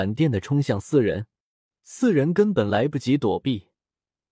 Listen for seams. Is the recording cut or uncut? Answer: uncut